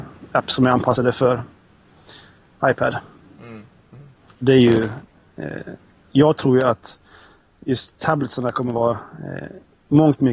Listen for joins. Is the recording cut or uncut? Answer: uncut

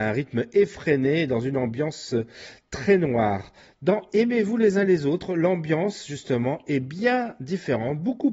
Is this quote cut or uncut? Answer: uncut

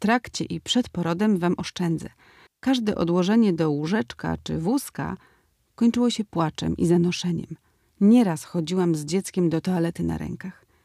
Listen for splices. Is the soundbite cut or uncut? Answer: cut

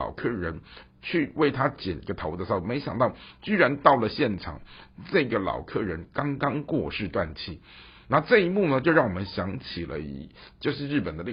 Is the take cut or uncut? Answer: uncut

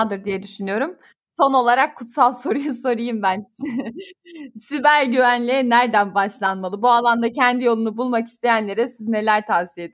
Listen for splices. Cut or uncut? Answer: uncut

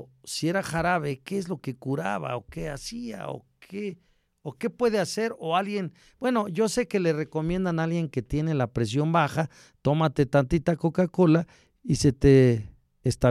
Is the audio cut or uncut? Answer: uncut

